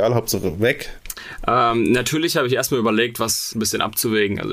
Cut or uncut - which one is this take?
cut